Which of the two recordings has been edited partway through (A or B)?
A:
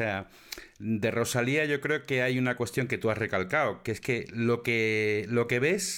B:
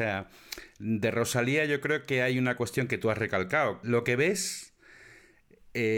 B